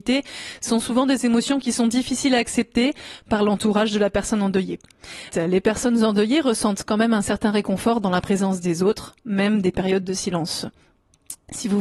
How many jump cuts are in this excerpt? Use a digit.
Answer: 1